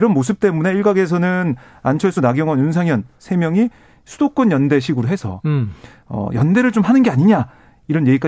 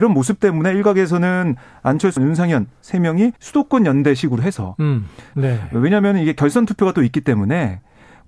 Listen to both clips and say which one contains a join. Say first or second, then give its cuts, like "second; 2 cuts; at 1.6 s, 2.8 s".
second; 3 cuts; at 2.2 s, 3.4 s, 5.3 s